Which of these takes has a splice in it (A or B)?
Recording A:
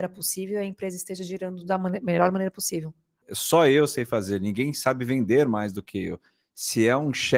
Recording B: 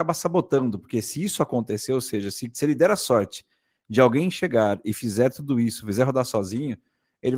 A